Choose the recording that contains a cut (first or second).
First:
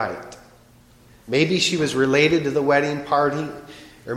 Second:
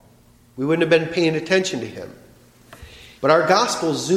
second